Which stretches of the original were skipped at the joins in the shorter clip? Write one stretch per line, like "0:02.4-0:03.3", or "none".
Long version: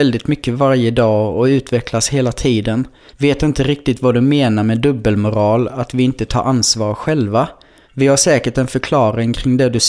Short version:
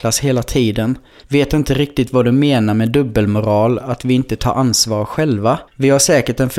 0:07.6-0:07.8